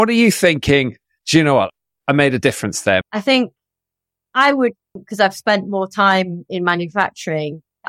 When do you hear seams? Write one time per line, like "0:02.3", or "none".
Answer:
0:03.0
0:05.0